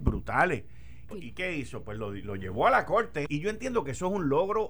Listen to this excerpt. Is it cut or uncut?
cut